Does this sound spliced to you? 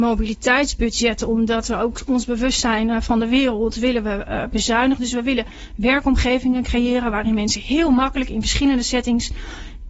no; 0 cuts

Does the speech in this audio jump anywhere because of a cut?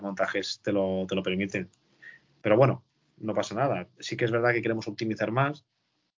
no; 0 cuts

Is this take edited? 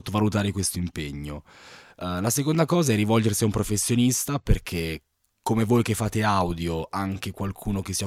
no; 0 cuts

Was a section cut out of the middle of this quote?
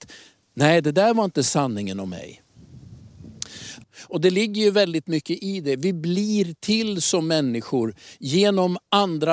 yes; 1 cut; at 3.8 s

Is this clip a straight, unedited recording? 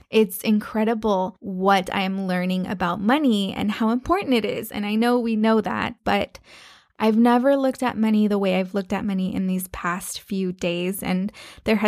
no; 1 cut; at 6.0 s

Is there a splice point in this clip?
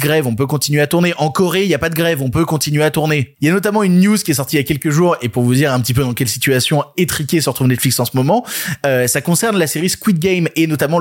yes; 1 cut; at 3.4 s

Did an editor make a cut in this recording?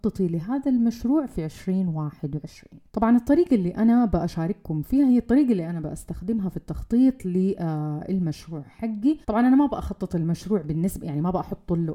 yes; 2 cuts; at 2.9 s, 9.2 s

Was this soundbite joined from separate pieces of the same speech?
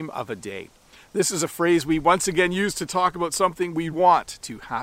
yes; 1 cut; at 3.9 s

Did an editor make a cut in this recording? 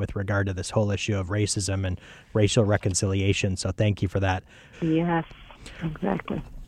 yes; 1 cut; at 4.7 s

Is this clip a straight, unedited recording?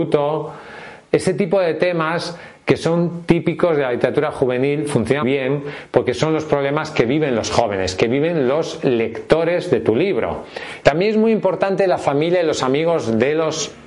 no; 2 cuts; at 5.2 s, 10.8 s

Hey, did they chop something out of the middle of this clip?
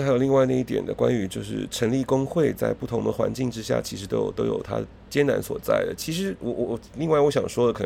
no; 0 cuts

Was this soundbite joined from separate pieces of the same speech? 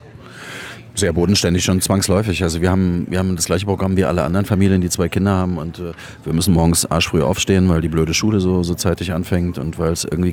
no; 0 cuts

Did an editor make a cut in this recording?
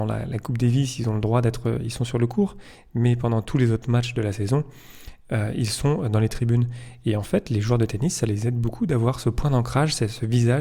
no; 0 cuts

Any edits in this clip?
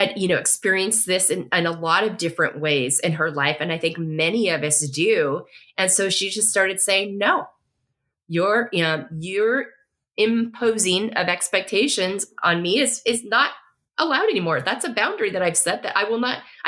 no; 0 cuts

